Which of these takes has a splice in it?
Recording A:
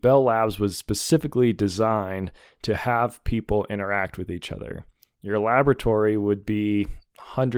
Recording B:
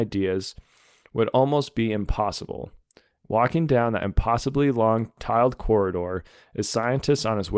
B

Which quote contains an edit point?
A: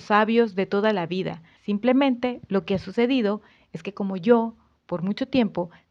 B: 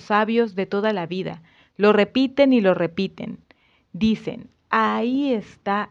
A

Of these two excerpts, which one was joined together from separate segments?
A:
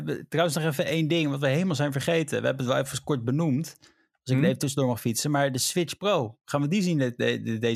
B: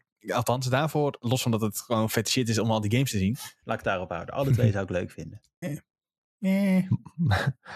B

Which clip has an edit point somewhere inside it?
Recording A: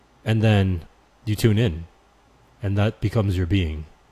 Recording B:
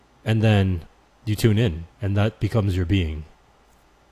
B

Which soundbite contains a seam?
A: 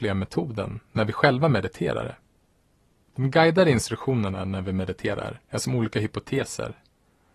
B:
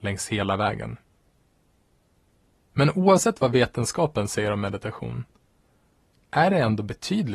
A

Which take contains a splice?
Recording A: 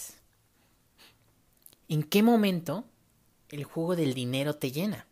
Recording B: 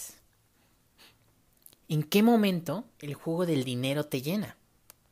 B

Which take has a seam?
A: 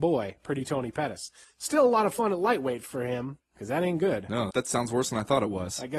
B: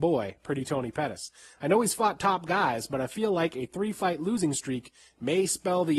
A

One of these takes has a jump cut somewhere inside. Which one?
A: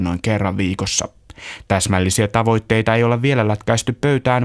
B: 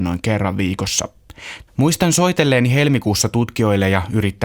B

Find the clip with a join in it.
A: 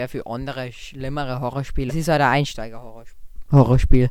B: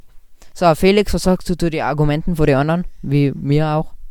A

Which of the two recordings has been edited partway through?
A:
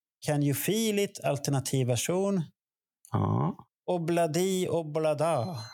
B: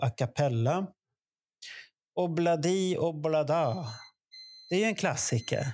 A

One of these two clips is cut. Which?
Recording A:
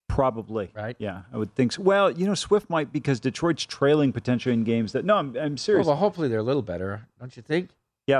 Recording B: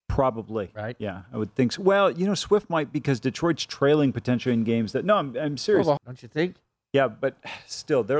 B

